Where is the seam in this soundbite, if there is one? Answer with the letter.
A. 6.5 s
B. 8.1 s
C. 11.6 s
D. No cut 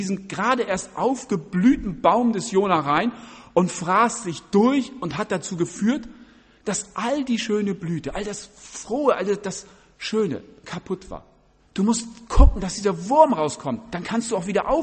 C